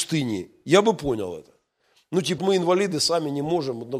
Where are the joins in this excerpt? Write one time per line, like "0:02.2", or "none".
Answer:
0:02.4